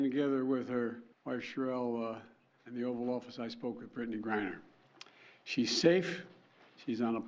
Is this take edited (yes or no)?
no